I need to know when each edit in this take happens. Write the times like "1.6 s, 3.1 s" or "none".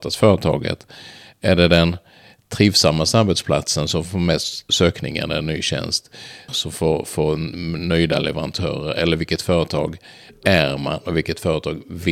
4.7 s, 6.5 s